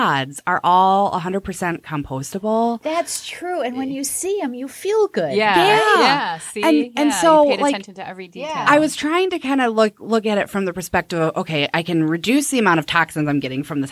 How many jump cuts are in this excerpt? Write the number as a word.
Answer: zero